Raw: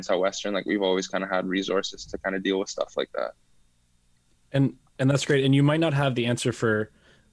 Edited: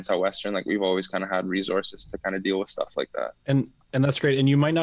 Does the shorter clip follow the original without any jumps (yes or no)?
no